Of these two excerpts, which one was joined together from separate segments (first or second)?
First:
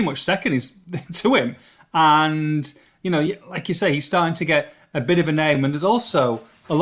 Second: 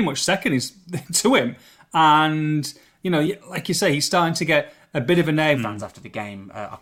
second